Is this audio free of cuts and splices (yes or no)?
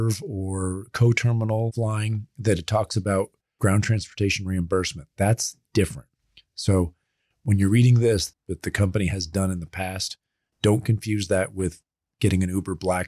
no